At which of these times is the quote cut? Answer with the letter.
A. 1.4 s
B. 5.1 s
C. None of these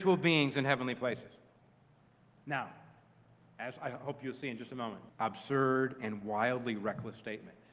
B